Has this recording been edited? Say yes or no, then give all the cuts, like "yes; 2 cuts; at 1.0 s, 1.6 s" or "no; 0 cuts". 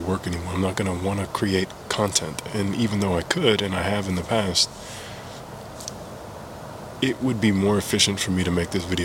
no; 0 cuts